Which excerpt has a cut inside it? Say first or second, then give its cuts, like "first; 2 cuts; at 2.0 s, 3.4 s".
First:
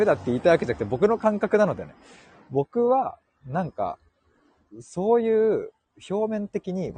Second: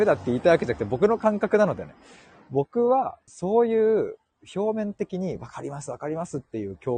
second; 1 cut; at 3.3 s